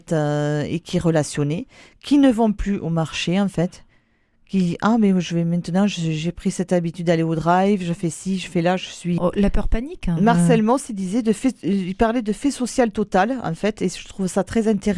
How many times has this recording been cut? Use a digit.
1